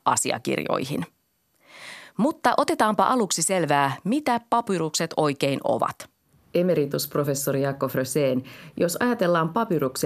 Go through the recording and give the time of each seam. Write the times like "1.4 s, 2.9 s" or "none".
none